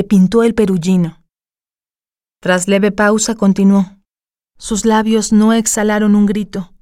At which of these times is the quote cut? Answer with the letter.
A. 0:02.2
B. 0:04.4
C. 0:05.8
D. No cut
B